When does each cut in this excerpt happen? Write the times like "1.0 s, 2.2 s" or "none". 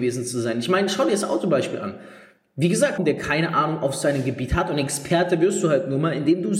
3.0 s